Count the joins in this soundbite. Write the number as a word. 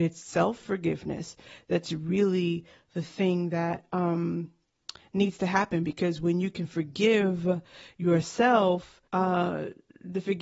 one